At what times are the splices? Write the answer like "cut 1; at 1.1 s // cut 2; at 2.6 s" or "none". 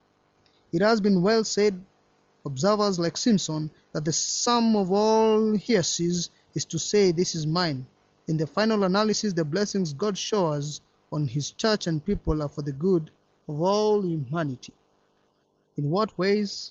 cut 1; at 8.2 s